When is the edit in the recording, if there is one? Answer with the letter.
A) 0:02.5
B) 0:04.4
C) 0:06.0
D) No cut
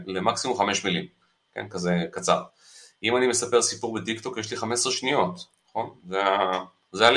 D